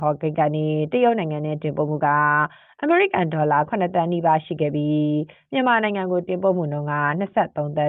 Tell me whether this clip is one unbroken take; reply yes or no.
yes